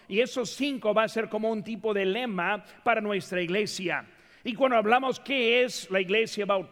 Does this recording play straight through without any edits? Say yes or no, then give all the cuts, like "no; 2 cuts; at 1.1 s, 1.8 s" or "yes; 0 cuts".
yes; 0 cuts